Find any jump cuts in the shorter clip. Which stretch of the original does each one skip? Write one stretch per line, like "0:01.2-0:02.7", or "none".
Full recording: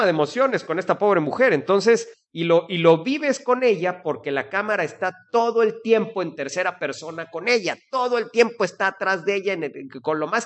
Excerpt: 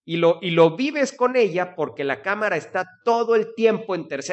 none